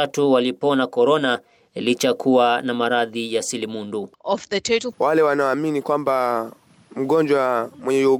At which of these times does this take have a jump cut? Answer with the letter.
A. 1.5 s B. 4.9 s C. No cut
B